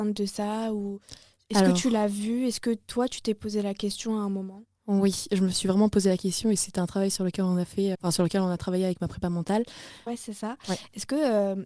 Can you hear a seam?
yes; 2 cuts; at 7.9 s, 10.1 s

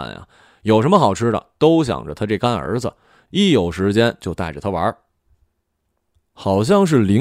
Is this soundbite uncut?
yes; 0 cuts

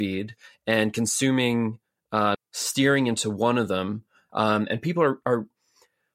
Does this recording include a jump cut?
yes; 2 cuts; at 2.3 s, 4.3 s

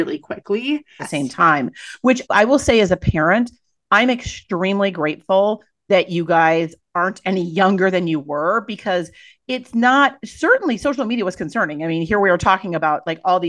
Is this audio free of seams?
no; 2 cuts; at 1.0 s, 2.2 s

